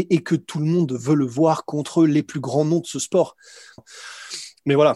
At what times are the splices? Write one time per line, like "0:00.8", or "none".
0:03.8